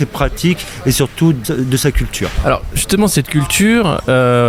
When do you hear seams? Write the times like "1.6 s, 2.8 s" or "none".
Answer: 1.4 s